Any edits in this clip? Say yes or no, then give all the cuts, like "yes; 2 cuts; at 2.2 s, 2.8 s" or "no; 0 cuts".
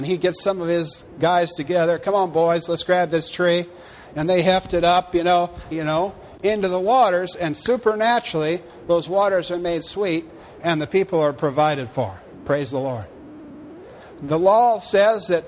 yes; 2 cuts; at 5.7 s, 14.2 s